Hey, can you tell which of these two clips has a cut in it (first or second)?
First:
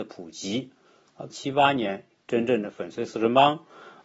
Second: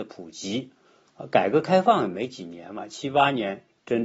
first